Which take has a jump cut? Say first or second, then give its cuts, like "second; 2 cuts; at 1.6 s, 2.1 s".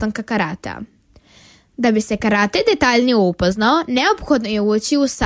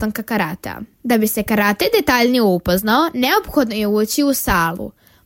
second; 1 cut; at 0.9 s